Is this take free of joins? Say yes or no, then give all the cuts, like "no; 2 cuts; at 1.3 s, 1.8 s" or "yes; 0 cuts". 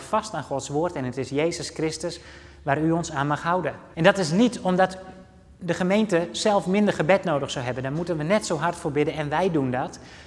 no; 1 cut; at 3.9 s